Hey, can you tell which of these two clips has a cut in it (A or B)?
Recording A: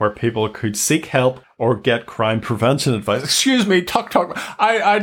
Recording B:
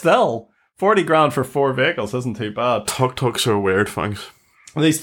A